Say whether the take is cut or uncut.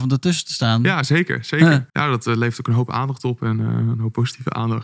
cut